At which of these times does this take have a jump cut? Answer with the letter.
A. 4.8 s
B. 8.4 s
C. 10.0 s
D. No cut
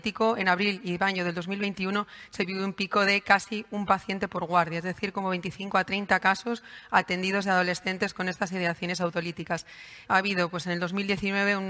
C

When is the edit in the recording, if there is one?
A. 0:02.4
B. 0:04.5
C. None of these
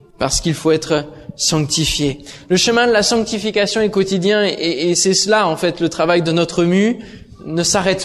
C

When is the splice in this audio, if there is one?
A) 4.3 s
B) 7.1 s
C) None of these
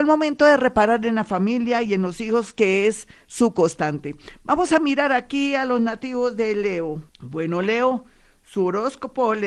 B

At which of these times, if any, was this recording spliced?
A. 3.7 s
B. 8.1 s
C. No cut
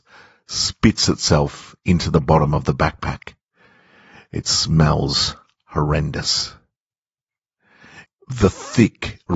B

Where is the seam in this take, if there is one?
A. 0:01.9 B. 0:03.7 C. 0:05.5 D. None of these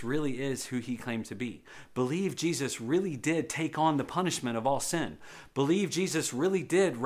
D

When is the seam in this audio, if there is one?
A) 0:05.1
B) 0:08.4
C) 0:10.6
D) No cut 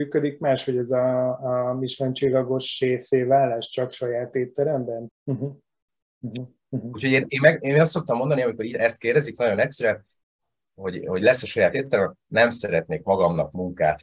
A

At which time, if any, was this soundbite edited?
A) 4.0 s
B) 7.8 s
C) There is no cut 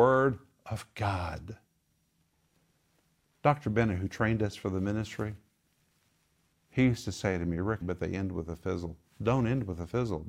B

